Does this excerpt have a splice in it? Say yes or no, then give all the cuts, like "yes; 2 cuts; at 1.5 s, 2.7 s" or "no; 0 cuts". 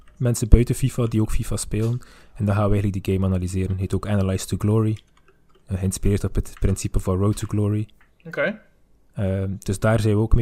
no; 0 cuts